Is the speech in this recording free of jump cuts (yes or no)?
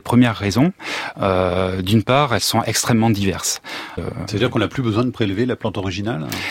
no